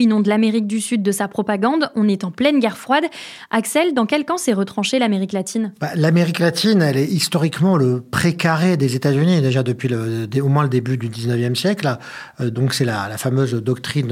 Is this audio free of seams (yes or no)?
yes